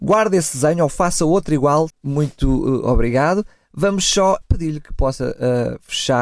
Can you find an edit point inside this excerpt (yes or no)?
yes